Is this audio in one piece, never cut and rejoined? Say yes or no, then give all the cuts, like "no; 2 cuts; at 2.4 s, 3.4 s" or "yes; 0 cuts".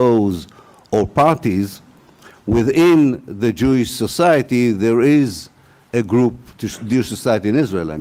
yes; 0 cuts